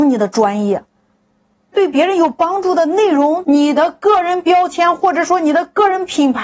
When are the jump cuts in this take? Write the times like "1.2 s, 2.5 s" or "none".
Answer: 1.7 s, 3.4 s